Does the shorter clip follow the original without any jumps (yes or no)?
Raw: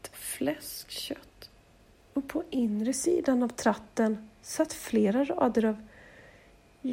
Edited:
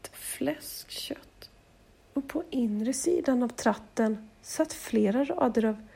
yes